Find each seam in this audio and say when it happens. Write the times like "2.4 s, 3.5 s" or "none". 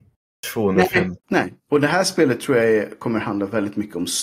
1.2 s